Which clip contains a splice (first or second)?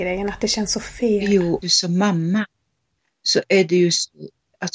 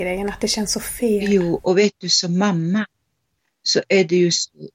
first